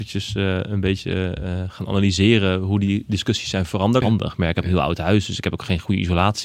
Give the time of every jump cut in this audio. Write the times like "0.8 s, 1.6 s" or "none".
4.0 s